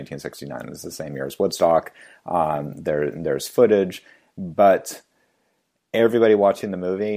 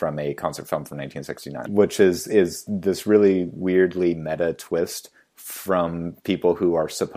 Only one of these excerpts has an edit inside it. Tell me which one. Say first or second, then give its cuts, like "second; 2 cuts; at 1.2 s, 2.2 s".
second; 1 cut; at 1.7 s